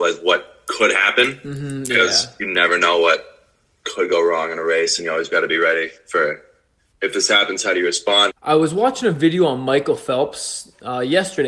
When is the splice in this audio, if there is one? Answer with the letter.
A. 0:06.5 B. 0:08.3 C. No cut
B